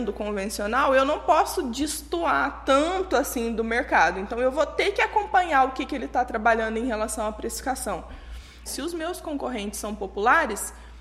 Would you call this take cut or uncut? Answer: cut